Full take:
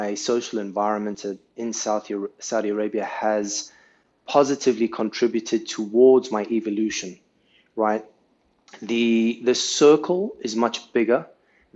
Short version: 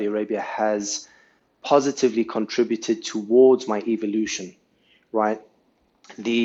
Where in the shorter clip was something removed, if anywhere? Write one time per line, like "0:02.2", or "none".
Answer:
none

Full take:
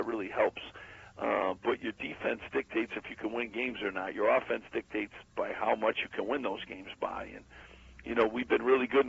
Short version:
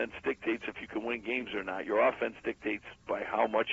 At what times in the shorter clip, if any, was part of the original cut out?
none

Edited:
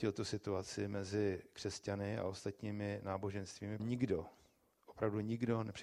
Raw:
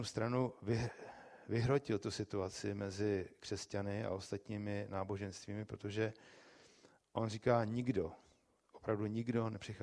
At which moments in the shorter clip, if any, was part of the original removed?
0:03.8

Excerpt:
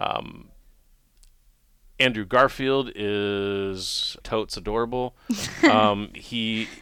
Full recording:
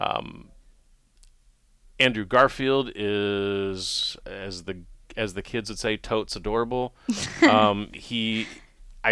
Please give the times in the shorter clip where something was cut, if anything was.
0:04.2

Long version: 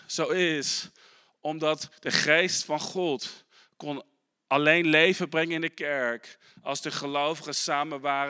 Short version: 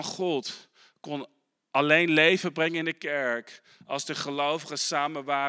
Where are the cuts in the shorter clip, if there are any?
none

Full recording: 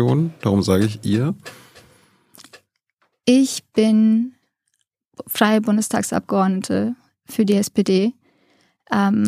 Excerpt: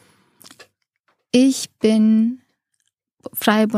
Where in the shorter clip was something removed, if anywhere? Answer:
none

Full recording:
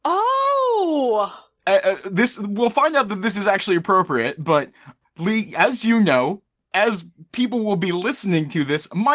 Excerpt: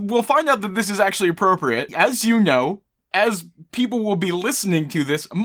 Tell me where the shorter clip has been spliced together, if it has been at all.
0:01.9

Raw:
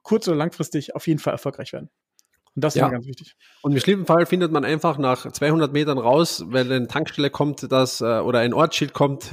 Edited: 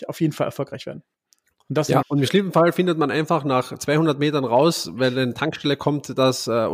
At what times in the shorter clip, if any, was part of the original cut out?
0:02.0

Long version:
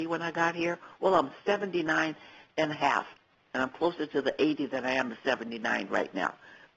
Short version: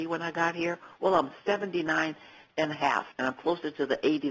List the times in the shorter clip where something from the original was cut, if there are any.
0:03.1

